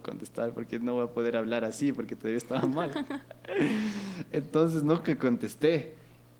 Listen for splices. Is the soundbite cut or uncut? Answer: uncut